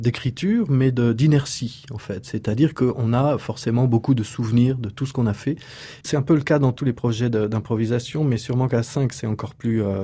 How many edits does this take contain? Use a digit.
1